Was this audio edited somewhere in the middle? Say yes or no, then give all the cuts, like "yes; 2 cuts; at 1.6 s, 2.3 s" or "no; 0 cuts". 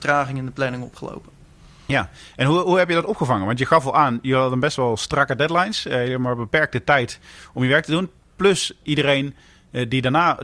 no; 0 cuts